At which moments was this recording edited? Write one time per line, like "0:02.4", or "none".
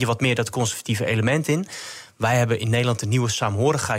none